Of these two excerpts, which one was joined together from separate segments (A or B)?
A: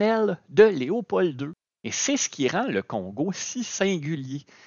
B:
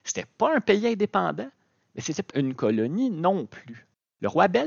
B